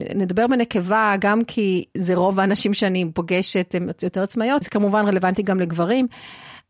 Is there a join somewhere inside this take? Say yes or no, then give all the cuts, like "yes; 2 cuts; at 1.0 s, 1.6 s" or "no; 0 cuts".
yes; 1 cut; at 4.6 s